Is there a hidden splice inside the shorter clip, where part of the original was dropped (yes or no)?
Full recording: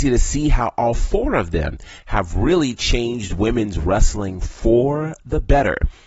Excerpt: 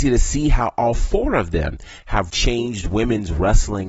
yes